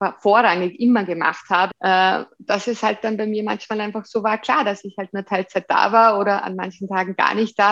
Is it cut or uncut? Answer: cut